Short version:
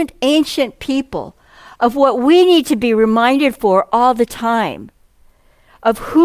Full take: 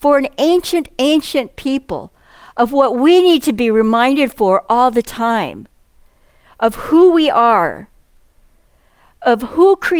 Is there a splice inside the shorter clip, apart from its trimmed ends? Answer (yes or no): no